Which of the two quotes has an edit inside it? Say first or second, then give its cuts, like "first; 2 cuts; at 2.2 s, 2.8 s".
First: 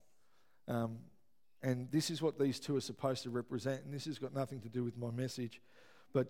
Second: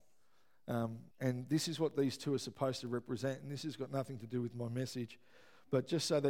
second; 1 cut; at 1.1 s